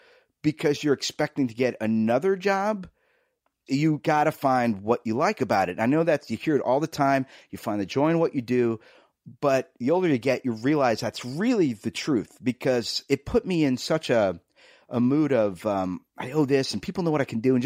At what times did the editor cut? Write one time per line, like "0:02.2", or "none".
none